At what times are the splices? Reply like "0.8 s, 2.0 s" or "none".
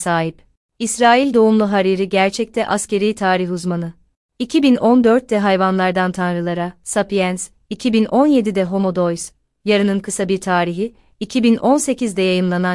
none